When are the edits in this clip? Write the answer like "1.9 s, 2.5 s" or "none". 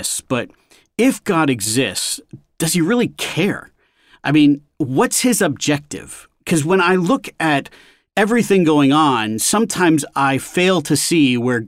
none